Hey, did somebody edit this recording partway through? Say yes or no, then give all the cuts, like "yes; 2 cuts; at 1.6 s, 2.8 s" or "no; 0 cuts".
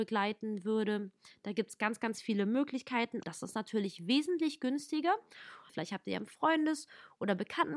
yes; 2 cuts; at 3.2 s, 5.7 s